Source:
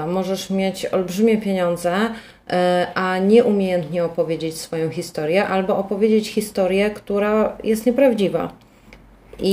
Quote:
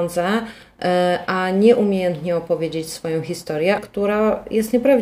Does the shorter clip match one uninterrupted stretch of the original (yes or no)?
no